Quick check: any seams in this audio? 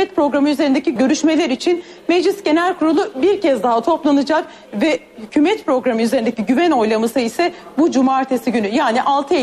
yes; 1 cut; at 1.0 s

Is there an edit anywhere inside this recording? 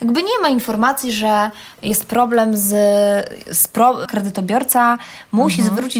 yes; 1 cut; at 4.1 s

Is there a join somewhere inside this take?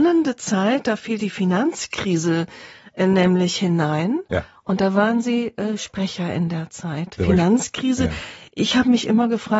no; 0 cuts

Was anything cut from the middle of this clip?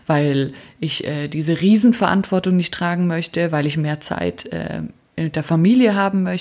no; 0 cuts

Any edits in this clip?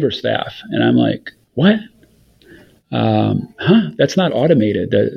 no; 0 cuts

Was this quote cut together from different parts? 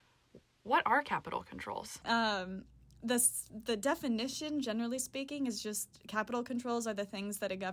yes; 1 cut; at 2.0 s

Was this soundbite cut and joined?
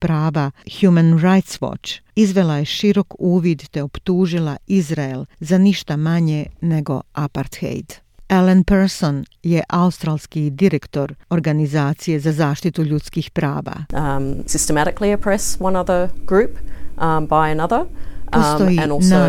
yes; 1 cut; at 14.5 s

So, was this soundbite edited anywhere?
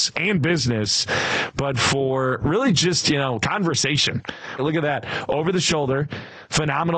yes; 1 cut; at 4.6 s

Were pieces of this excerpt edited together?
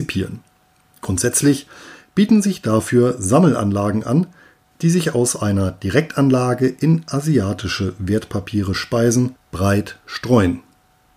yes; 1 cut; at 4.7 s

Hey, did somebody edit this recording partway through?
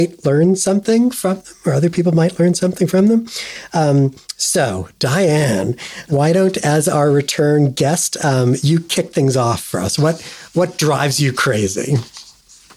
no; 0 cuts

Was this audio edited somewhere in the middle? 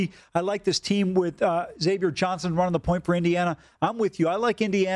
no; 0 cuts

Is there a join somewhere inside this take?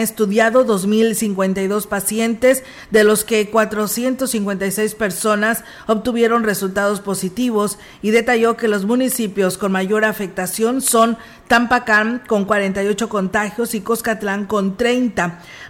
no; 0 cuts

